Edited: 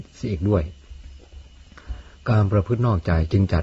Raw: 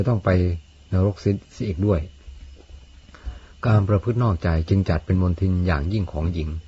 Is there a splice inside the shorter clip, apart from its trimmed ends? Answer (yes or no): no